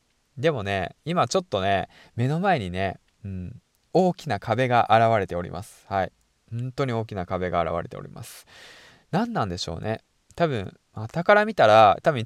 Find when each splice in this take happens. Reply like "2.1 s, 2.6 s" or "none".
none